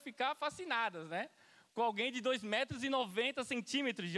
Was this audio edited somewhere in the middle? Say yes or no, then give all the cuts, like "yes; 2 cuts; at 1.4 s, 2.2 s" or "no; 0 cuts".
no; 0 cuts